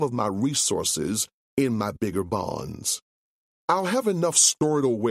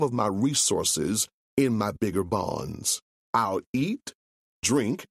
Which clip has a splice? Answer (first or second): second